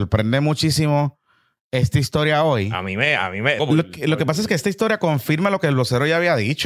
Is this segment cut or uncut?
cut